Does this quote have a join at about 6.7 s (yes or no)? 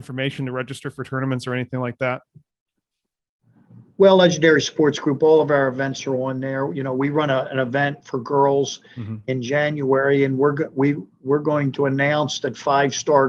no